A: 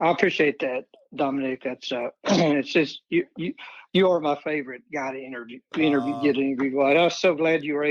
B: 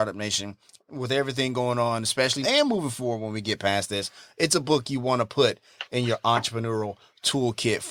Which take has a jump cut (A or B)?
B